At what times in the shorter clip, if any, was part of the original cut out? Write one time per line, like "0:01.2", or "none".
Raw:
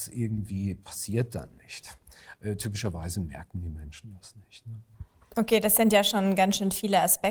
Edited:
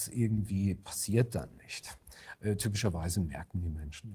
none